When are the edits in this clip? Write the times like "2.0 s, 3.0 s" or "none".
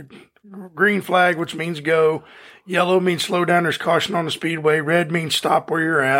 none